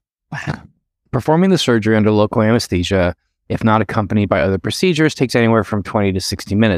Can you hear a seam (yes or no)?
no